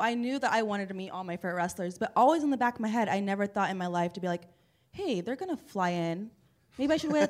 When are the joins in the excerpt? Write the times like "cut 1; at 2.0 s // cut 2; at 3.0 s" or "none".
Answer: none